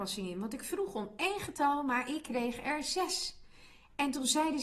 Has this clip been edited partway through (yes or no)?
no